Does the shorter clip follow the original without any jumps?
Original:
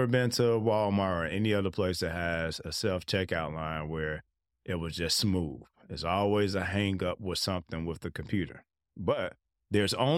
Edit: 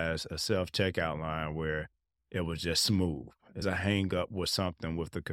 no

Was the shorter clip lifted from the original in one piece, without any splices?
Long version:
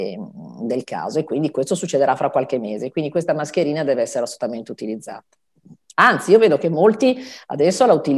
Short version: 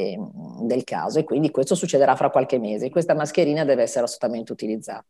no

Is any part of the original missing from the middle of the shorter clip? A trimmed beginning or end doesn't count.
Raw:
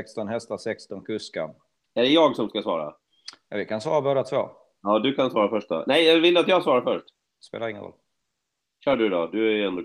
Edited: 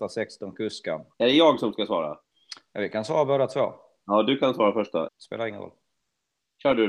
yes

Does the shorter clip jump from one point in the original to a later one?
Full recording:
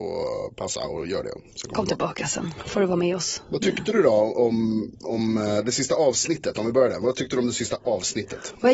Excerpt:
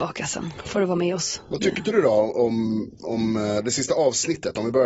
no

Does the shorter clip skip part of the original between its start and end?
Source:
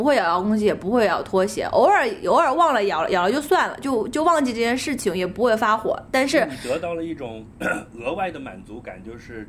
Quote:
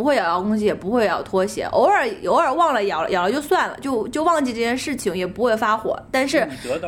no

